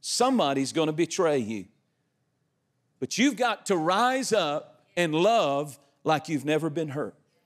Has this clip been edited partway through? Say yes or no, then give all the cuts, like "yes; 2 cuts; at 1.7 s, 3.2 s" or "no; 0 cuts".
no; 0 cuts